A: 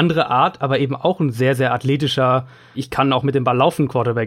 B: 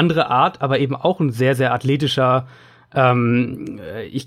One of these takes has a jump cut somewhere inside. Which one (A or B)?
A